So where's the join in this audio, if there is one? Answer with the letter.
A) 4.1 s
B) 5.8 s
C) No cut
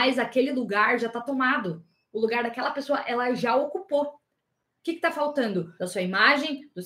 B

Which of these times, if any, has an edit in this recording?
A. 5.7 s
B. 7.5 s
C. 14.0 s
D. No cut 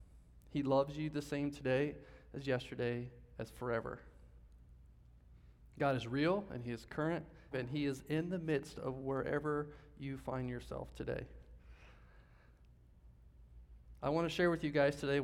B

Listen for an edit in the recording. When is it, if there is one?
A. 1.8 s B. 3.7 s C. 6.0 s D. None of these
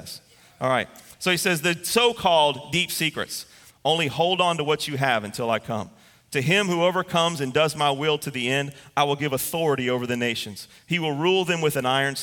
B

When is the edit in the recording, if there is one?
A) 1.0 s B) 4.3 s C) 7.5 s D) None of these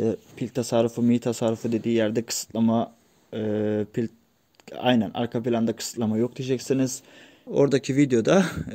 C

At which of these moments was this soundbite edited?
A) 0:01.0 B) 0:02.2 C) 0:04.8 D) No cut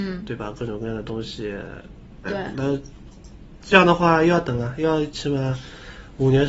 B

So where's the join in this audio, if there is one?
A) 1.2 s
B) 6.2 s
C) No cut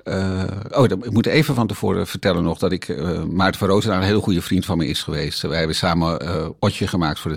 C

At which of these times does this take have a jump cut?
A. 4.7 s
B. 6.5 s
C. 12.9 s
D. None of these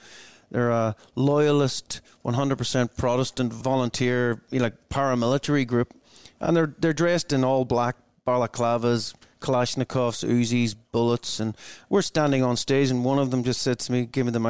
D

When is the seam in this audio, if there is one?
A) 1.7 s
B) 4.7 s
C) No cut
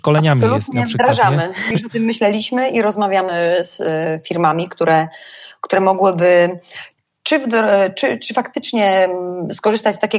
A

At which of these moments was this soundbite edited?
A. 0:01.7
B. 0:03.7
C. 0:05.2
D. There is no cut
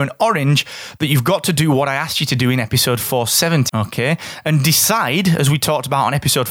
B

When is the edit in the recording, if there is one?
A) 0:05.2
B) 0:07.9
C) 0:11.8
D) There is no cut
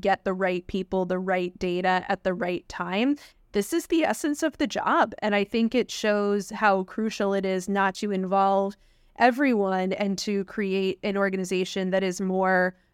B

